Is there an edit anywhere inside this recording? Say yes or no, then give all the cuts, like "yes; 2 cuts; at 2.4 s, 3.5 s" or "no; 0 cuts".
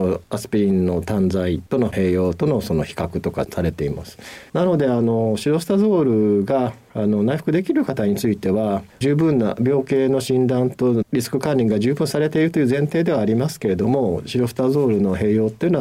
yes; 1 cut; at 4.5 s